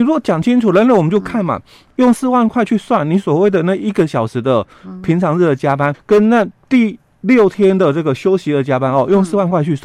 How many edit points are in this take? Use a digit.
1